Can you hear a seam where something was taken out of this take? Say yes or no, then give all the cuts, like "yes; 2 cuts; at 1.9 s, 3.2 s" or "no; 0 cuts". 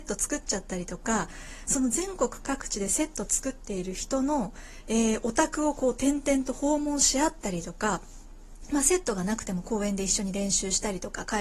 no; 0 cuts